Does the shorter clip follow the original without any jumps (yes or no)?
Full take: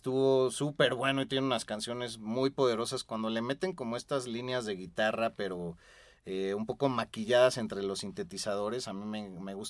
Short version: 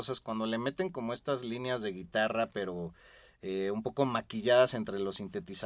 yes